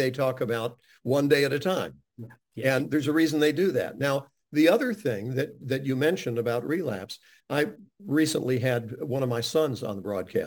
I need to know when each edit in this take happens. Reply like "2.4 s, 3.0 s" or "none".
none